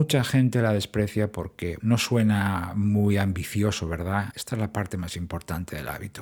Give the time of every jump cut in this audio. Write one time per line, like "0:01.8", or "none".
0:01.8
0:04.3